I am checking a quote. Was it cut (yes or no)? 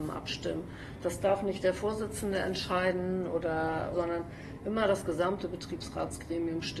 yes